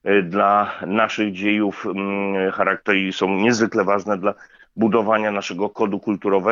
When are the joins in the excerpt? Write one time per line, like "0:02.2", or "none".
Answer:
none